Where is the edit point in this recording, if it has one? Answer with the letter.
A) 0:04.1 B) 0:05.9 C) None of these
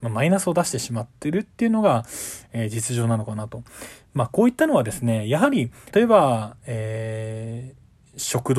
B